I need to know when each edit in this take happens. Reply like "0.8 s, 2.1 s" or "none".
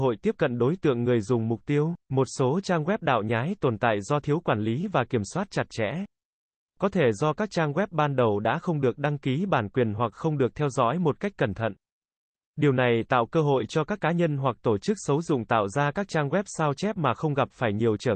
2.0 s